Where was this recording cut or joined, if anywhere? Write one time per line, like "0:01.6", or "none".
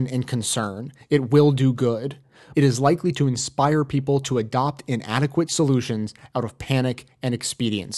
0:02.5